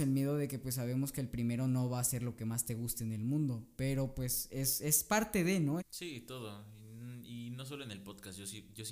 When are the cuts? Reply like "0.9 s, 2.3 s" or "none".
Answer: 5.8 s